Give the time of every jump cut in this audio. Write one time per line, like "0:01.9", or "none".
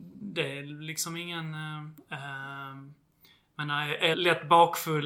0:02.0
0:04.1